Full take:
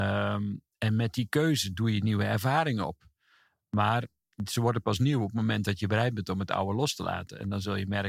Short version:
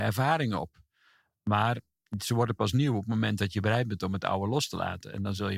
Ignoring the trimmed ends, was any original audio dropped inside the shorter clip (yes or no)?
no